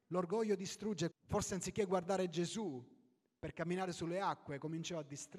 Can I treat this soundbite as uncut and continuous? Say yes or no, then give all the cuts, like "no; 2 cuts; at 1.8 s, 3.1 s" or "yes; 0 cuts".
no; 1 cut; at 1.1 s